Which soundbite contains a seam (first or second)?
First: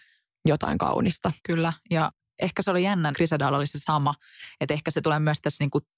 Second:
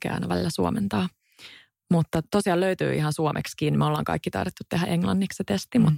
first